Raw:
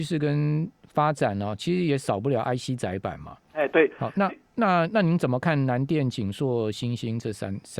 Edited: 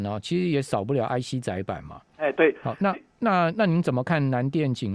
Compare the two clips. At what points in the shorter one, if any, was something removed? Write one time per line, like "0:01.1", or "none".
none